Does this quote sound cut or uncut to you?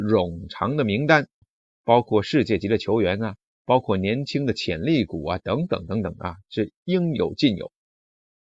cut